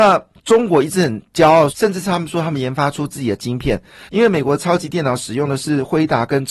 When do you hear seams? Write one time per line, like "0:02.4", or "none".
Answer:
0:01.7
0:04.1